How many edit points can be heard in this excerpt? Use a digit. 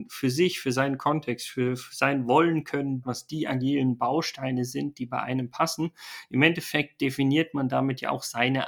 1